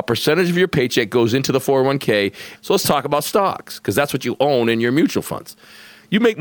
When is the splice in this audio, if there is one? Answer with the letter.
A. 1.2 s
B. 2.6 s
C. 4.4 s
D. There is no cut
B